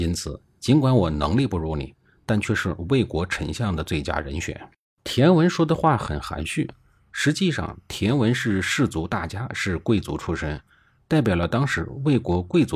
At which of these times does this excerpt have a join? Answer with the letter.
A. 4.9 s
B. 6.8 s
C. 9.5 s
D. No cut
A